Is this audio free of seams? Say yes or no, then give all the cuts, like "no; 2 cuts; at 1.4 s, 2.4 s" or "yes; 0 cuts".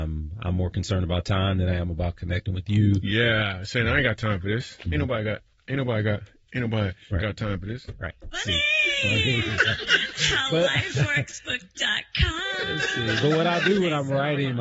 yes; 0 cuts